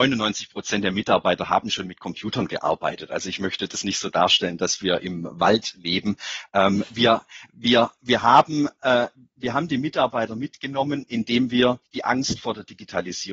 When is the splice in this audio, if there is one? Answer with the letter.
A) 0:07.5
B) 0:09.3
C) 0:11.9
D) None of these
C